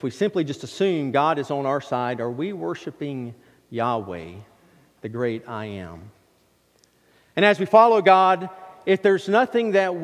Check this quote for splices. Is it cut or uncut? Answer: uncut